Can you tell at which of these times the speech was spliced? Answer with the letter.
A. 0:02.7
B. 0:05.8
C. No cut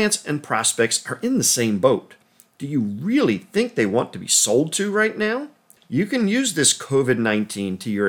B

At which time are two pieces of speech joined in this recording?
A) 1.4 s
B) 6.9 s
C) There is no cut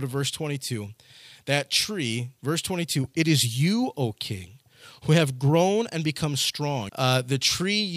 B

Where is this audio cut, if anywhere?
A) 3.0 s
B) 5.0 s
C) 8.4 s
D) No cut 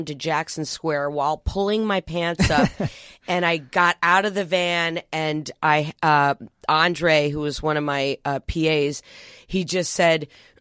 D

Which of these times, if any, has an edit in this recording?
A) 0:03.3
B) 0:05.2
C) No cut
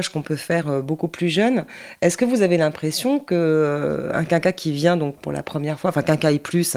B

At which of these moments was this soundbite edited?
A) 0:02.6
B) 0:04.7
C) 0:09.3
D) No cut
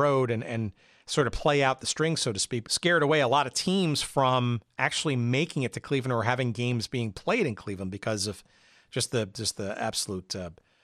A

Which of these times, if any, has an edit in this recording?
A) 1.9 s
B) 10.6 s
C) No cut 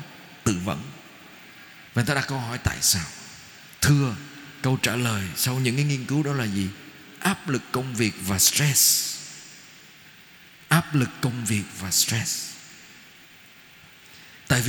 A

